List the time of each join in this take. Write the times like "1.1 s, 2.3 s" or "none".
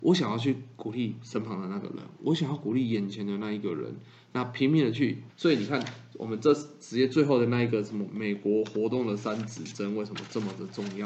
5.3 s